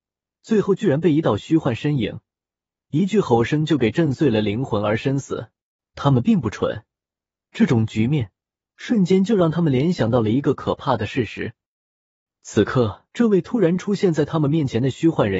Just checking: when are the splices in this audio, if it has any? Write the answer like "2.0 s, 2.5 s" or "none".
5.8 s, 13.1 s